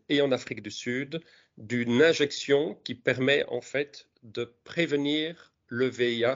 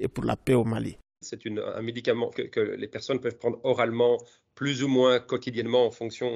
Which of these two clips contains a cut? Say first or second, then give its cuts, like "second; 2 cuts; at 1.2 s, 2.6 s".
second; 2 cuts; at 1.2 s, 2.4 s